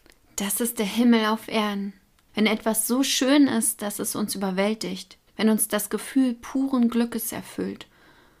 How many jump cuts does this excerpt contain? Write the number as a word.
two